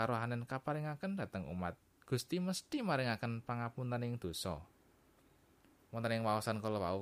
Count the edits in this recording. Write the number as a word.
one